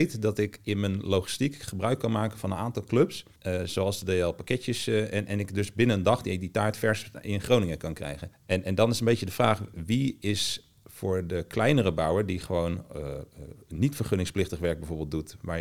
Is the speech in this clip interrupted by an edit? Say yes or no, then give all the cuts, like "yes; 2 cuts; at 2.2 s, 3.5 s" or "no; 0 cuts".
no; 0 cuts